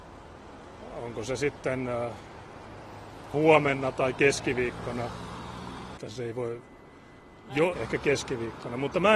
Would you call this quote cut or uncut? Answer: cut